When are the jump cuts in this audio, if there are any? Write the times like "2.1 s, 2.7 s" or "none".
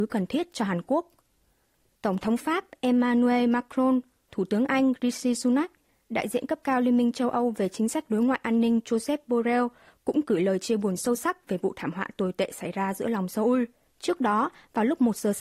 13.8 s